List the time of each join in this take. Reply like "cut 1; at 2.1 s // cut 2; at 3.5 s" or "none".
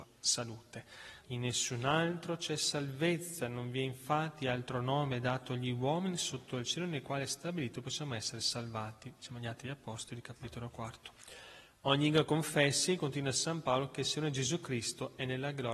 cut 1; at 1.2 s